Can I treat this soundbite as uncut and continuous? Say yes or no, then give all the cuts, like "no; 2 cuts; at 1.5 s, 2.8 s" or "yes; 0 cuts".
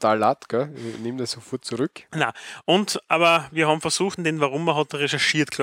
no; 2 cuts; at 2.1 s, 4.2 s